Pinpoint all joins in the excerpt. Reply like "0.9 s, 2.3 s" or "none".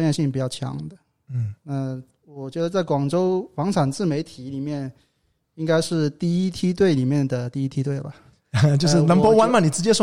none